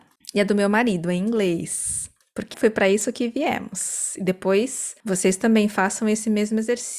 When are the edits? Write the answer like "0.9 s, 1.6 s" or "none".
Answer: 2.5 s